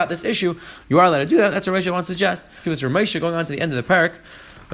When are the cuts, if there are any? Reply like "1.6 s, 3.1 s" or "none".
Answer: 2.6 s

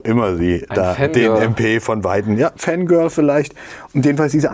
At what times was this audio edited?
none

